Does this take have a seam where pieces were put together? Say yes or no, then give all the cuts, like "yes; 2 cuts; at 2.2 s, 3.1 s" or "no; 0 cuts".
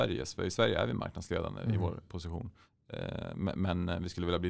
yes; 1 cut; at 2.1 s